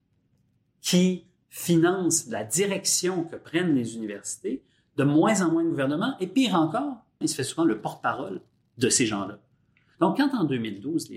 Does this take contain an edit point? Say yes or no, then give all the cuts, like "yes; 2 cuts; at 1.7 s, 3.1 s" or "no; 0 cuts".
yes; 2 cuts; at 7.2 s, 9.9 s